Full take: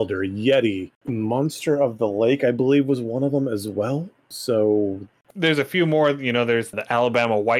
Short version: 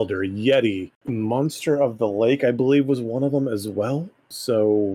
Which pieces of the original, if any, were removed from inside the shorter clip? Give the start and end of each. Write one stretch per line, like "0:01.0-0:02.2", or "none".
none